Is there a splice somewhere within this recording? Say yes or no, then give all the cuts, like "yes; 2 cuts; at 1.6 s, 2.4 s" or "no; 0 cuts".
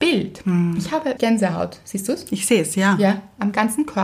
yes; 1 cut; at 1.2 s